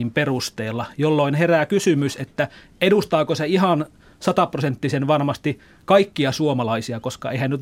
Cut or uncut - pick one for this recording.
uncut